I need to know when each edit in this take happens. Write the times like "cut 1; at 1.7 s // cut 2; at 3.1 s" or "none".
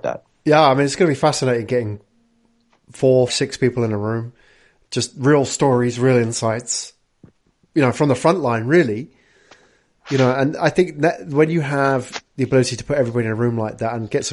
cut 1; at 3.3 s